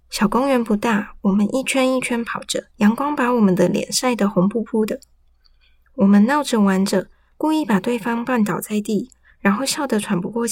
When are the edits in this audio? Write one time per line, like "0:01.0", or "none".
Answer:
0:02.7